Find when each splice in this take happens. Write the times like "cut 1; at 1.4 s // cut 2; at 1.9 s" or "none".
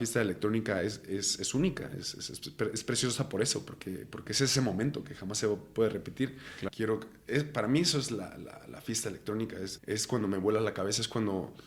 cut 1; at 6.7 s // cut 2; at 9.8 s